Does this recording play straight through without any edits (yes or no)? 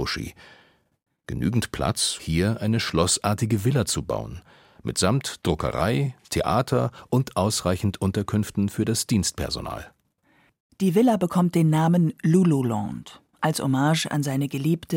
no